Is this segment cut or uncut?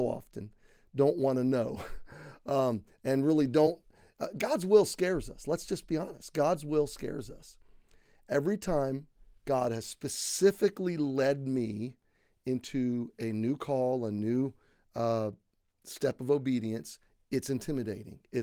uncut